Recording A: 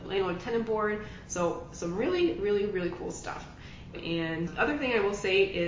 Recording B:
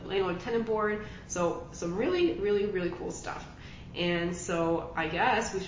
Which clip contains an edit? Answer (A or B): A